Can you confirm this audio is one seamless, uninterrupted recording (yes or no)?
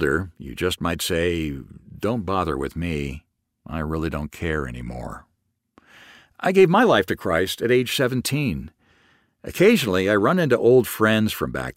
yes